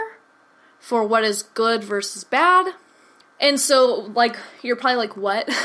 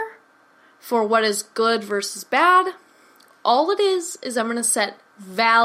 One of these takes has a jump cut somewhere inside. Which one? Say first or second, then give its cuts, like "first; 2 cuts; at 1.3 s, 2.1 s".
first; 1 cut; at 3.2 s